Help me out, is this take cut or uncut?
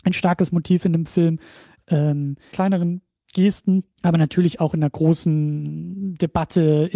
cut